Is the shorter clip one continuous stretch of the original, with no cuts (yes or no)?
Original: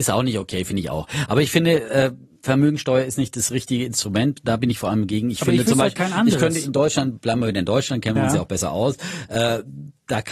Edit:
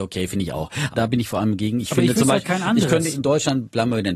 no